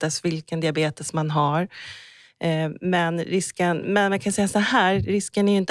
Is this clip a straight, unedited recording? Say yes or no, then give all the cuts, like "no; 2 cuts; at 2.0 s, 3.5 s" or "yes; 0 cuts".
yes; 0 cuts